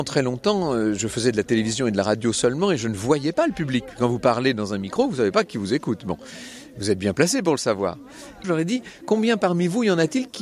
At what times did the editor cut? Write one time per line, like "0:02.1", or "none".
0:08.4